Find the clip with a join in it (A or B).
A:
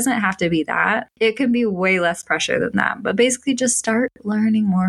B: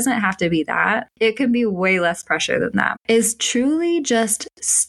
B